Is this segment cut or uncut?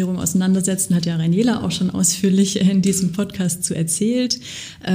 uncut